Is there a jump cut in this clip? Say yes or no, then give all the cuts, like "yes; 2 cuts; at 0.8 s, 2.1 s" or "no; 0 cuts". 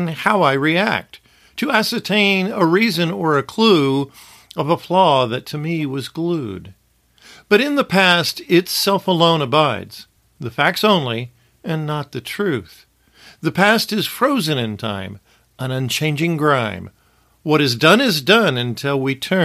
no; 0 cuts